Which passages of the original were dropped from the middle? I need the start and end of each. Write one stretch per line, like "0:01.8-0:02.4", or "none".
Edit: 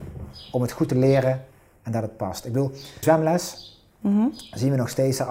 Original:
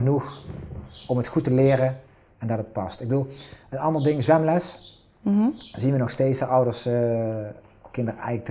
0:03.6-0:04.2